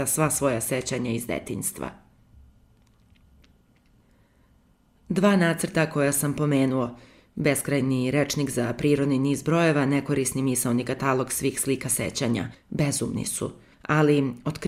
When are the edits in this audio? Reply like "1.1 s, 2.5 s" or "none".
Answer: none